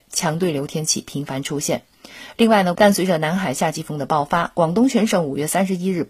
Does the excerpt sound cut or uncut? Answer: cut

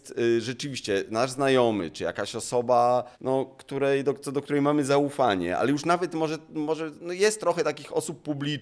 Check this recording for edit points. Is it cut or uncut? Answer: cut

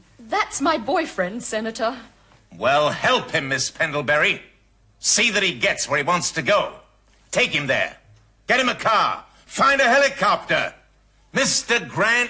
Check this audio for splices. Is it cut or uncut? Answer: uncut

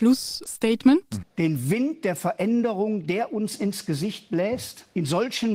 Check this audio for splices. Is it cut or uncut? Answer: cut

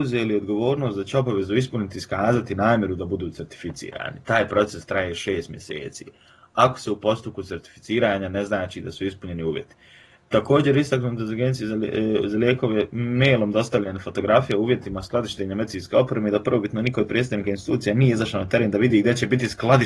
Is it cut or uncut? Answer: uncut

